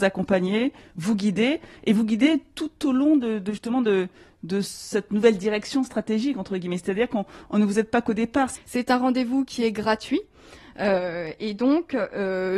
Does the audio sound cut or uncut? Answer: cut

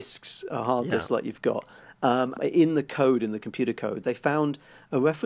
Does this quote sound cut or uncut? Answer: cut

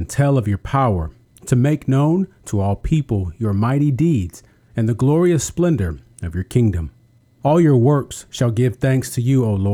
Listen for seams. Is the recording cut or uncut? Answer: cut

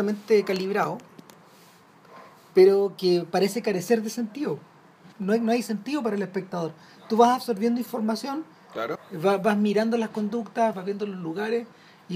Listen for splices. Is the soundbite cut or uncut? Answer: cut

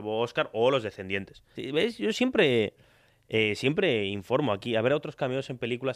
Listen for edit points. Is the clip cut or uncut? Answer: cut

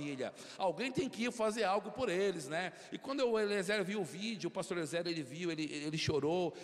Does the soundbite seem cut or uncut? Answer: uncut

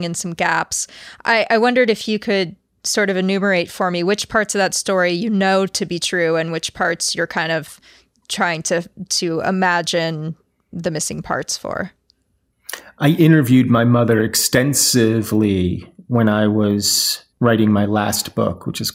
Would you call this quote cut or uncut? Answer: cut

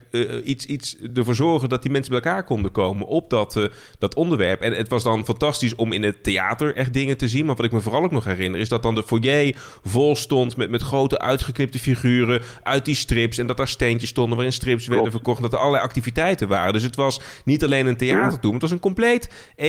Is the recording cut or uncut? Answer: uncut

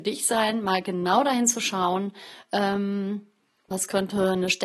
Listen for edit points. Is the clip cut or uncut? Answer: cut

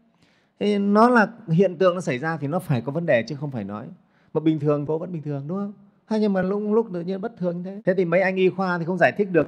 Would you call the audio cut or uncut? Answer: uncut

